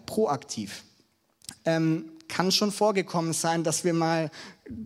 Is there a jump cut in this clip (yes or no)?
yes